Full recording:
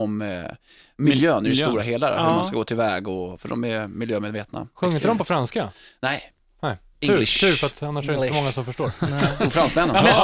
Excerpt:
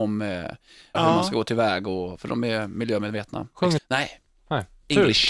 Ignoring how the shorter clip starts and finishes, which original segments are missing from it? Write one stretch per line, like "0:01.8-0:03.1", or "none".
0:00.9-0:02.1
0:05.0-0:05.9